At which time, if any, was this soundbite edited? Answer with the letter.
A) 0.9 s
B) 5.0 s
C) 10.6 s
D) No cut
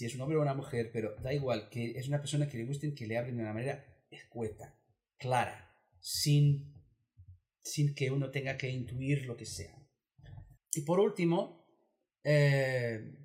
C